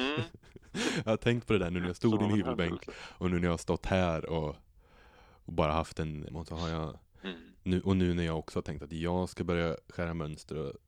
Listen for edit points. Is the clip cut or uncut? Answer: cut